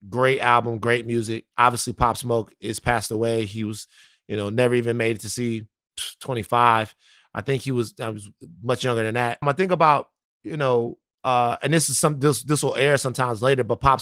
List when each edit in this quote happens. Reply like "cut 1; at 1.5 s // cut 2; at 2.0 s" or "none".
cut 1; at 9.4 s

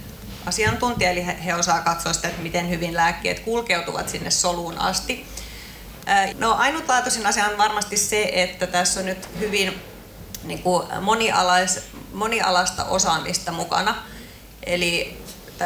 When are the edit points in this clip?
cut 1; at 6.3 s

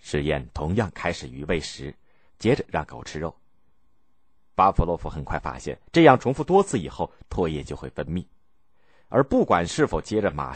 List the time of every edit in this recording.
cut 1; at 2.3 s // cut 2; at 5.9 s // cut 3; at 7.2 s

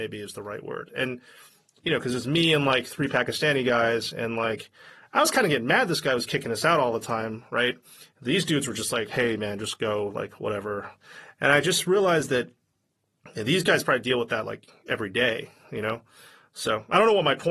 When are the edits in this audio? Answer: none

